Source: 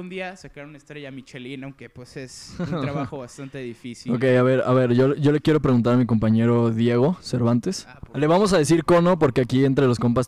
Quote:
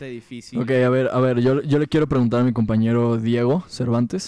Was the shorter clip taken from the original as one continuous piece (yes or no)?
yes